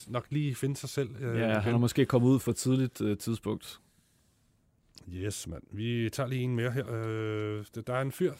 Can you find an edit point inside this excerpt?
no; 0 cuts

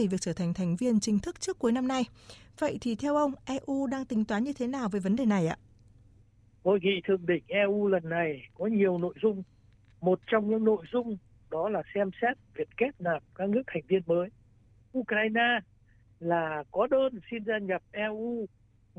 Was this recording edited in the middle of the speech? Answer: no; 0 cuts

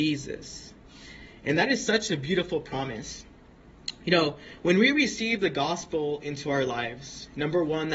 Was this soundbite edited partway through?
no; 0 cuts

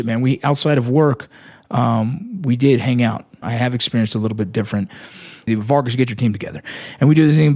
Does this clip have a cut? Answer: yes; 2 cuts; at 3.4 s, 5.5 s

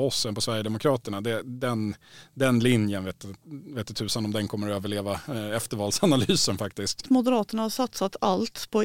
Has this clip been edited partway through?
yes; 1 cut; at 7.0 s

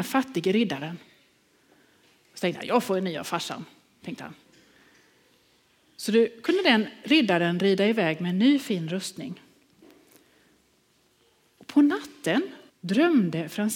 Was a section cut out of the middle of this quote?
yes; 1 cut; at 12.7 s

